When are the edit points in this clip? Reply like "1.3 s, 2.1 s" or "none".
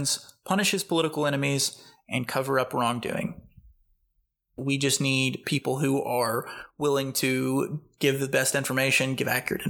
4.6 s